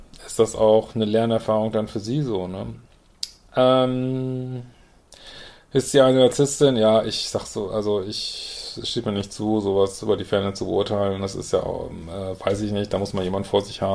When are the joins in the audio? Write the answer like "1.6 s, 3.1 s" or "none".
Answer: none